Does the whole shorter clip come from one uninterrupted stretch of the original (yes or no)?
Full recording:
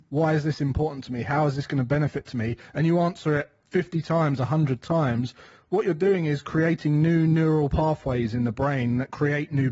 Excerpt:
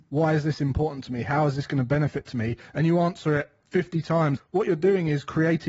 no